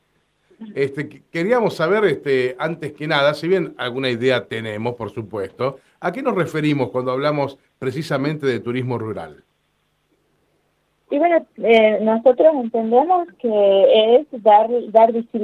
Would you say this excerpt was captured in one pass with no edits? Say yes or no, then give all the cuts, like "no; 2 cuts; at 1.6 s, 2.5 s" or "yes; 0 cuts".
yes; 0 cuts